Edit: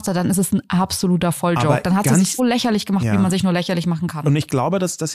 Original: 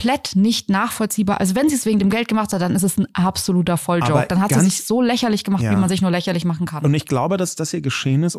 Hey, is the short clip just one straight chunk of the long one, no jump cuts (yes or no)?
no